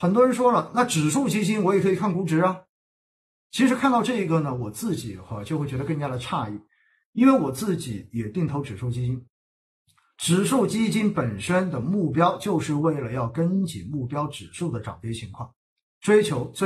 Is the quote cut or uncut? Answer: uncut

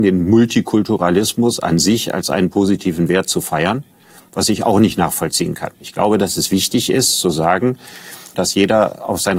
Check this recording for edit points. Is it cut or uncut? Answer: cut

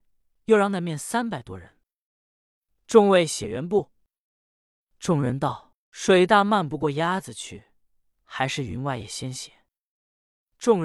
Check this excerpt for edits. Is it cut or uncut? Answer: uncut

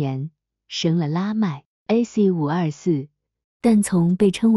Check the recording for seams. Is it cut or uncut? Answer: cut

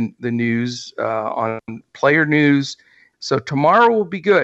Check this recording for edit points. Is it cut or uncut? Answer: cut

